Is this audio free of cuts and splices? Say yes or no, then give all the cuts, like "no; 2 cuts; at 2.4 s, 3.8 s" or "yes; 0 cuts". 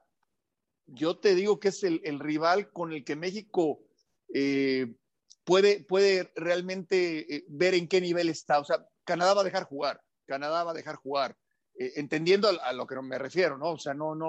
yes; 0 cuts